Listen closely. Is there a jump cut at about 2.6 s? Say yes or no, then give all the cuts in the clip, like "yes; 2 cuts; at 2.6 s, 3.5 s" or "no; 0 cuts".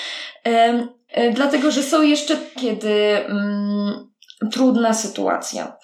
yes; 3 cuts; at 1.1 s, 2.6 s, 4.5 s